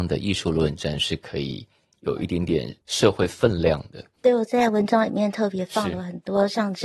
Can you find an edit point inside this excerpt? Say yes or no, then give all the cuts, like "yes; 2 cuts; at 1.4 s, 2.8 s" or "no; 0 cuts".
yes; 1 cut; at 4.1 s